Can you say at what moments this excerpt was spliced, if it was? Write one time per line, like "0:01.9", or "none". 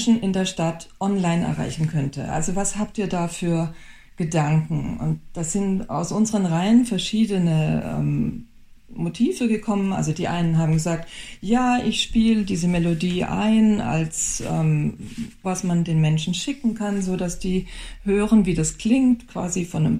0:15.4